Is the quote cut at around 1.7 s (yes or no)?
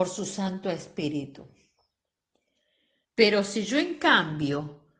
no